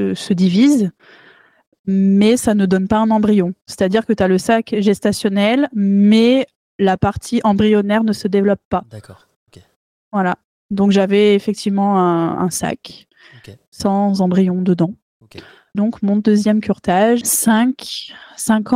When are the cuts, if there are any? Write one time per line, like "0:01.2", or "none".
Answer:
0:15.7
0:17.2